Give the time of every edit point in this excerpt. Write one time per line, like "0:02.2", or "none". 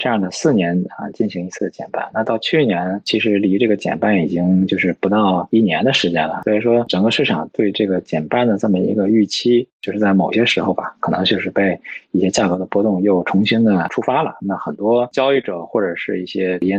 none